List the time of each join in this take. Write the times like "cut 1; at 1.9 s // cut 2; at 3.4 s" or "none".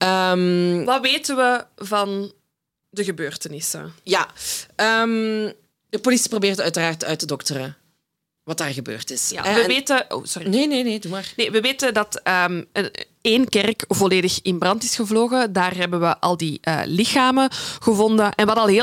none